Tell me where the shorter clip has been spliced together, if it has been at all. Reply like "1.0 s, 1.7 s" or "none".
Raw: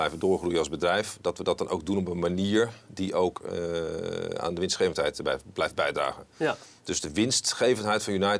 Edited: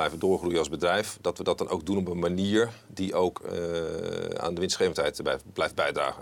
none